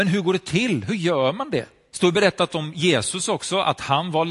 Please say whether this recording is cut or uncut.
cut